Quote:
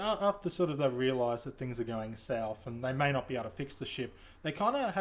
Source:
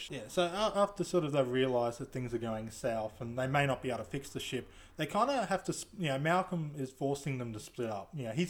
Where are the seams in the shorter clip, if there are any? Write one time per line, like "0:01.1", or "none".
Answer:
none

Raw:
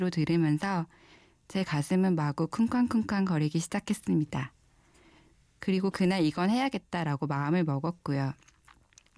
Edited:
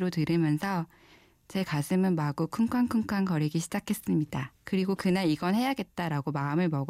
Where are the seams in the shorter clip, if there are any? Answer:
0:04.6

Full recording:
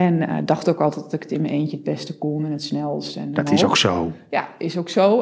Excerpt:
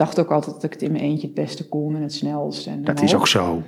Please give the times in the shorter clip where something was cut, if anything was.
none

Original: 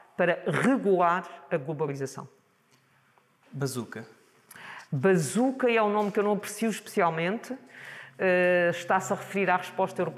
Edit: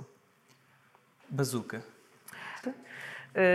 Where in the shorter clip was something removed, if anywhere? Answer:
0:02.6

